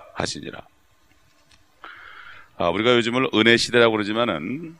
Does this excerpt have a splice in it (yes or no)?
no